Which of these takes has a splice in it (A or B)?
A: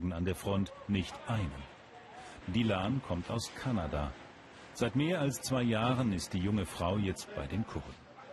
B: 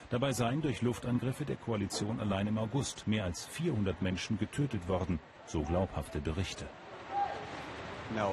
A